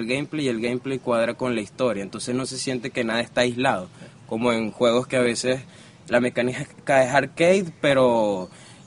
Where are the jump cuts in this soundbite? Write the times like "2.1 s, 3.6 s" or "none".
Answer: none

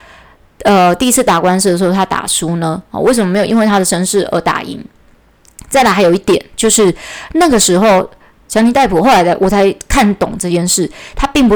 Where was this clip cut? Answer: none

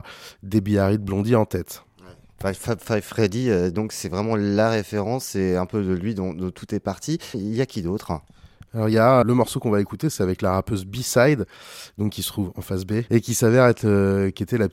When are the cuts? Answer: 7.3 s, 9.2 s, 13.1 s

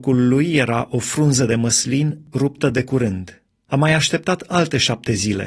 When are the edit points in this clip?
3.7 s

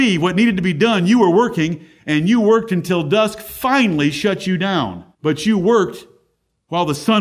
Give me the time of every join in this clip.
5.1 s

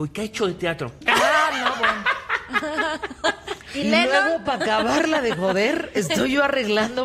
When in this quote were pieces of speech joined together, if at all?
1.0 s

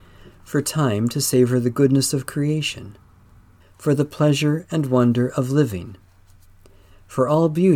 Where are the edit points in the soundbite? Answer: 3.6 s

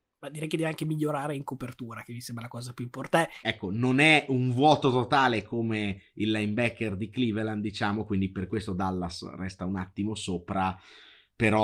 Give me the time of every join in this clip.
3.4 s

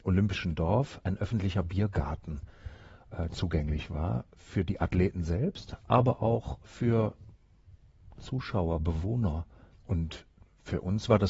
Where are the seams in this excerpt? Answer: 9.7 s

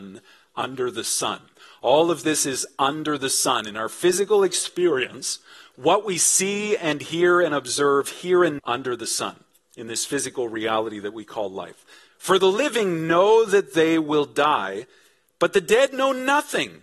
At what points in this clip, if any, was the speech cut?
8.6 s, 12.1 s

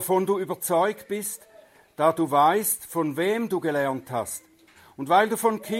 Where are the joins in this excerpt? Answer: none

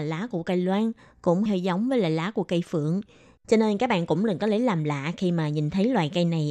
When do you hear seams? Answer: 1.5 s, 3.4 s

